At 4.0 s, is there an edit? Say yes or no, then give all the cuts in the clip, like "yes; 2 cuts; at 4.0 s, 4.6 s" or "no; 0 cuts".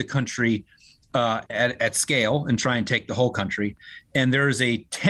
no; 1 cut; at 1.4 s